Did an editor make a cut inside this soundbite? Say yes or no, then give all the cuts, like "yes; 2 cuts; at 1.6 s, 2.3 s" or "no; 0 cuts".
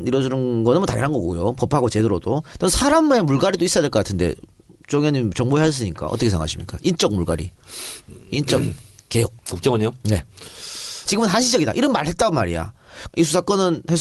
yes; 3 cuts; at 9.4 s, 11.1 s, 13.1 s